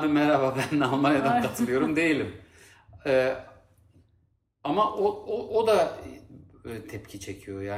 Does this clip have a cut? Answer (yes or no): no